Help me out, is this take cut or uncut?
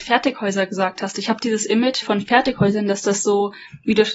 cut